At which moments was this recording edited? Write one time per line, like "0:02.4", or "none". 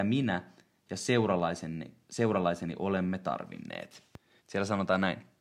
0:04.4